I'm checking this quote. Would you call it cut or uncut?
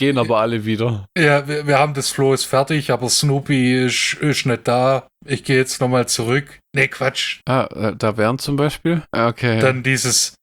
cut